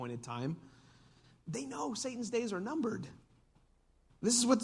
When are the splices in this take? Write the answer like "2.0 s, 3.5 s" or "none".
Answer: none